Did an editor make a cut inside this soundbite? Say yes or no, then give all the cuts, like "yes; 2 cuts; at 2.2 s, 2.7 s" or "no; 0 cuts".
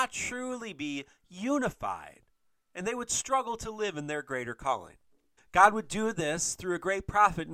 yes; 1 cut; at 5.4 s